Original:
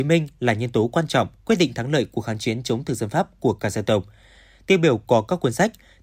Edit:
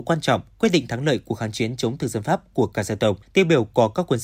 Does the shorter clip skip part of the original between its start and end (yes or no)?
yes